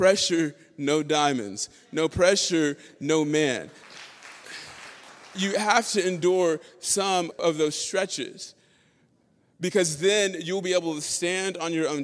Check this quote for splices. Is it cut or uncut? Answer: uncut